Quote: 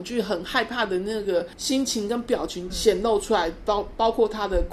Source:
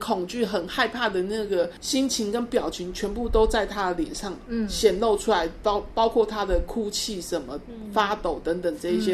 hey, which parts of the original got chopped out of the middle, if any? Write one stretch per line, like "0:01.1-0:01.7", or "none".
0:02.9-0:04.7